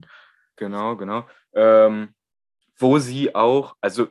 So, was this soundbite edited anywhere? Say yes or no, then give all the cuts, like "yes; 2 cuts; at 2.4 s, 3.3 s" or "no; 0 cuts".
no; 0 cuts